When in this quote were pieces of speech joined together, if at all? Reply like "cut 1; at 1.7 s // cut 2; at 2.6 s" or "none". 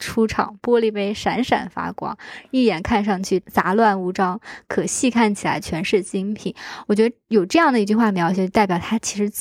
none

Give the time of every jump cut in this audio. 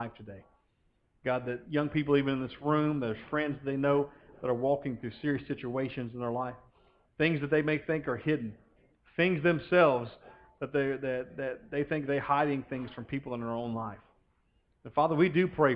none

